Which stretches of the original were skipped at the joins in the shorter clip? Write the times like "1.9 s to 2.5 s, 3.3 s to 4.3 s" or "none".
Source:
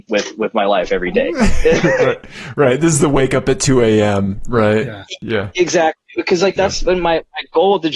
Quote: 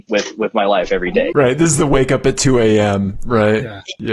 1.3 s to 2.5 s